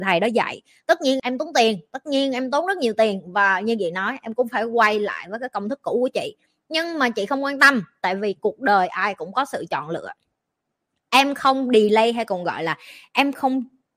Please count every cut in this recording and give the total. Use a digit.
1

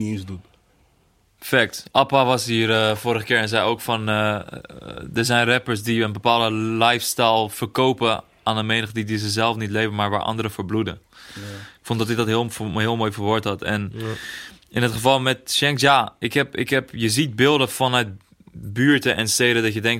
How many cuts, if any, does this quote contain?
0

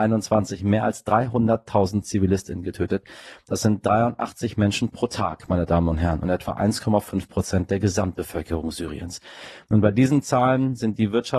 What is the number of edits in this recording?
0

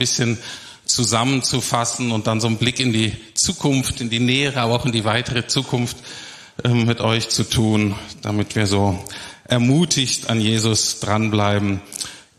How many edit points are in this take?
0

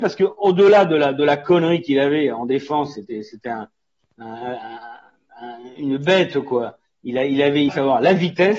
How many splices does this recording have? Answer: 1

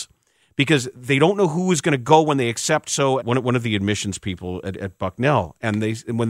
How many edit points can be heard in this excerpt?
1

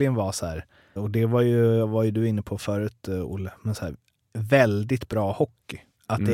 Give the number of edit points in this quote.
1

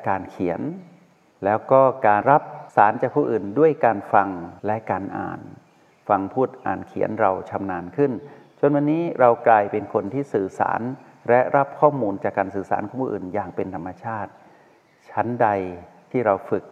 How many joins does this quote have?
2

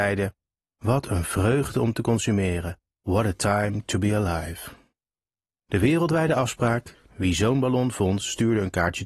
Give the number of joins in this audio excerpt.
1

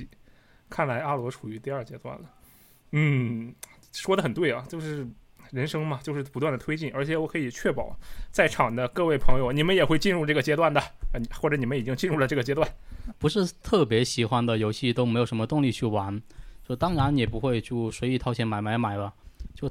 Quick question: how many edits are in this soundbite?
1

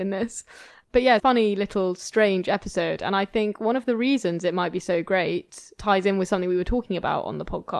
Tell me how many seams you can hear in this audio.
1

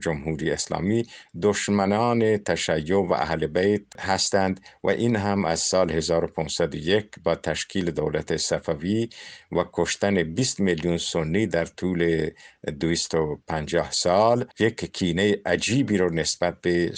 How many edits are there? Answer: 1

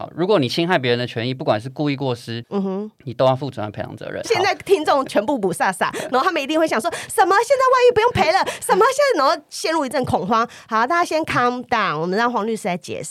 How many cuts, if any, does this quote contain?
1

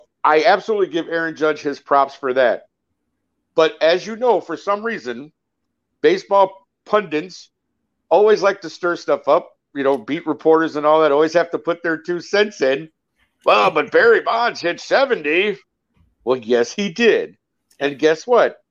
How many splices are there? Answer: 0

